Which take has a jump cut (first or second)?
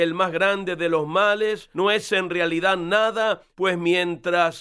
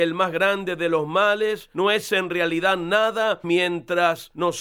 second